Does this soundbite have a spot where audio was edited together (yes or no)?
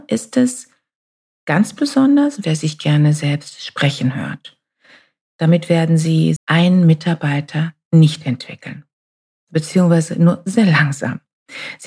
yes